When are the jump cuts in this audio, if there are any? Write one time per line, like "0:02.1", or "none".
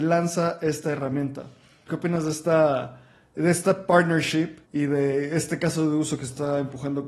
0:01.9
0:04.6

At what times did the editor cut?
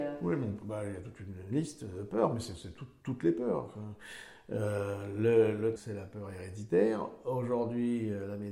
0:05.8

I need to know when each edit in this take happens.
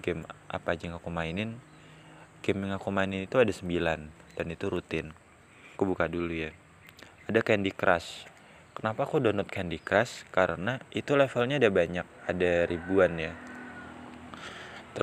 0:05.7
0:10.9

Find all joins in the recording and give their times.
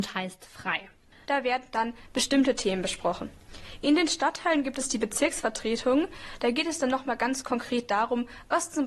0:01.2

